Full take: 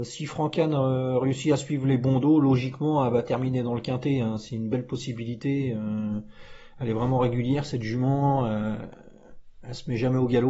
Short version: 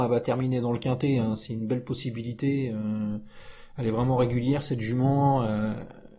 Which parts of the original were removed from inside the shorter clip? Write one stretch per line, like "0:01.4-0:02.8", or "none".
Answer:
none